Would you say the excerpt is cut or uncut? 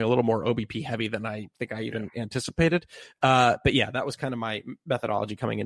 uncut